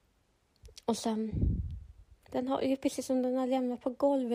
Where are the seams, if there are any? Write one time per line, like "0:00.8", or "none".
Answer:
0:02.2